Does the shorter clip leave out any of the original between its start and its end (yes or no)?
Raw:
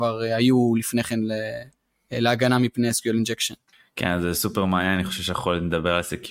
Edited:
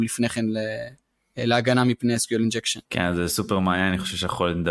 yes